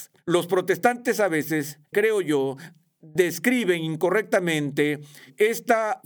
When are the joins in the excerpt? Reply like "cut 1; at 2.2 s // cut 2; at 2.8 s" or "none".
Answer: cut 1; at 1.9 s